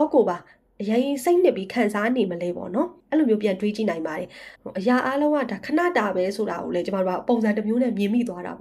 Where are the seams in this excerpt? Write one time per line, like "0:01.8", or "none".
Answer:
0:03.0
0:04.6